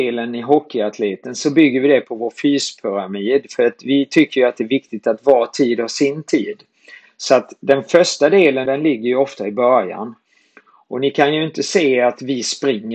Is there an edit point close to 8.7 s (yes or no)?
yes